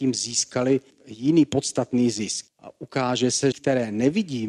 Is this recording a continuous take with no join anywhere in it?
no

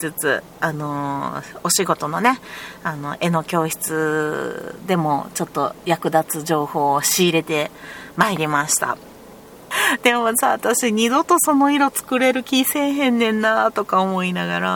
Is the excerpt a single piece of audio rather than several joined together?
no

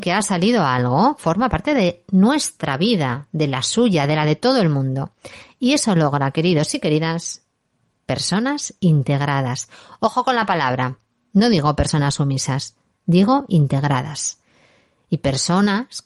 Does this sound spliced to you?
no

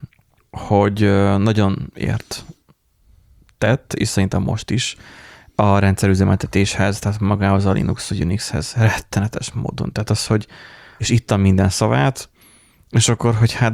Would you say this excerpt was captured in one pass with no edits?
no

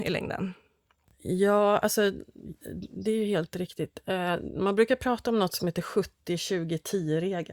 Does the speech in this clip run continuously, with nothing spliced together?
yes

